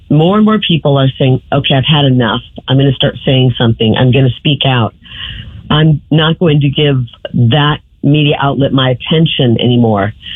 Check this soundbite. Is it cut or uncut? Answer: cut